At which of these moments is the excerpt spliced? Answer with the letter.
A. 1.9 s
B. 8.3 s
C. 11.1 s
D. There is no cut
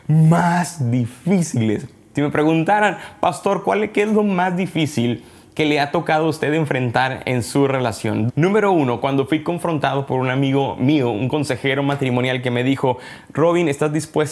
B